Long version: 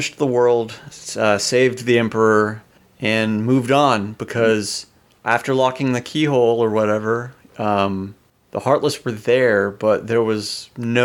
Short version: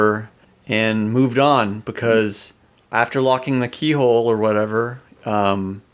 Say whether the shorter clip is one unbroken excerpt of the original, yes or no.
yes